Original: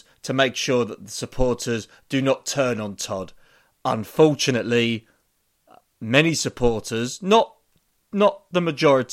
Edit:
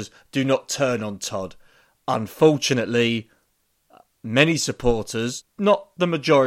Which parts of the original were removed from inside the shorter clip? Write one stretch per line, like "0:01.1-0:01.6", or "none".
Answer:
0:07.2-0:08.0